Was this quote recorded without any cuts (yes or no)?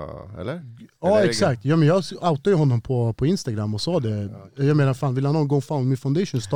yes